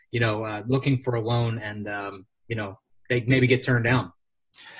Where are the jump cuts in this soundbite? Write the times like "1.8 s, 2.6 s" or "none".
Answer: none